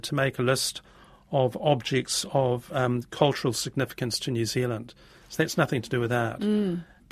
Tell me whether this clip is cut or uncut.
uncut